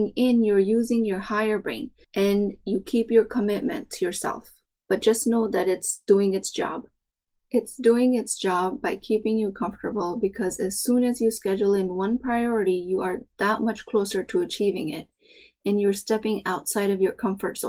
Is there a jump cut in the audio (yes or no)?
yes